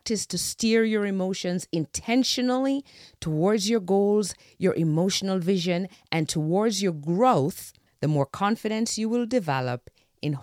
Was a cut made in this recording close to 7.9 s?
yes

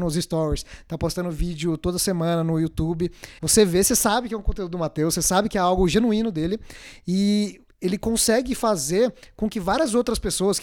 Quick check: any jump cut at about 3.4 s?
yes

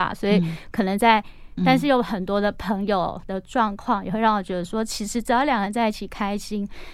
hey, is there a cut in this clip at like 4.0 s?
no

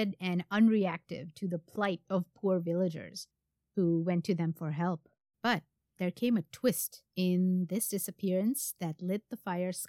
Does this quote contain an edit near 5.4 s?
yes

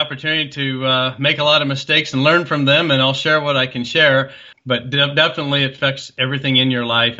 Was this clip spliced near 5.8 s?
no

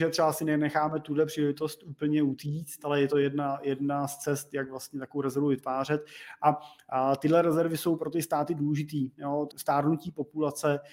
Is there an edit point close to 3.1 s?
no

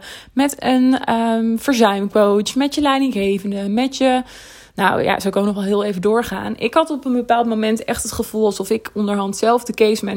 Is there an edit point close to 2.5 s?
no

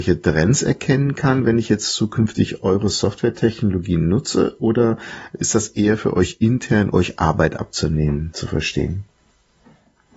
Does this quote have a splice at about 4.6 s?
no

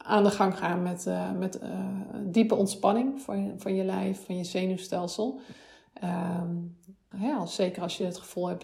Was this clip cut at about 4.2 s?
yes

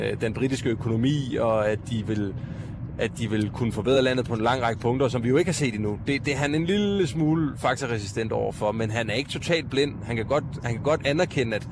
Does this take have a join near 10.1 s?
no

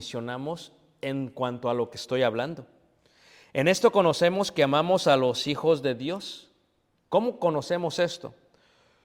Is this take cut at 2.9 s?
no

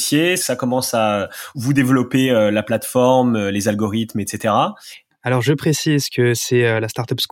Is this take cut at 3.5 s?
no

